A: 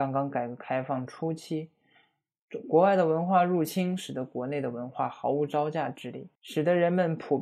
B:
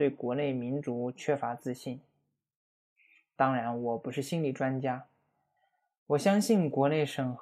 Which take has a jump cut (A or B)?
A